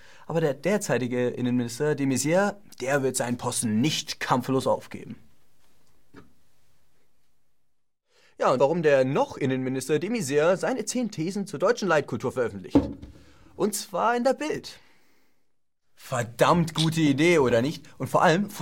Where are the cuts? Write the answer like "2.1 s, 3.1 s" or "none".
8.6 s, 15.8 s